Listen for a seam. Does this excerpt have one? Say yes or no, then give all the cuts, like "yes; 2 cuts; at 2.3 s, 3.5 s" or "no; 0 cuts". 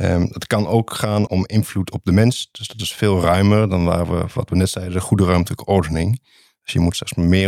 yes; 1 cut; at 1.3 s